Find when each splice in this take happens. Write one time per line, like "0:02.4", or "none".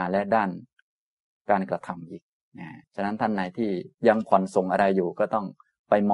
0:02.8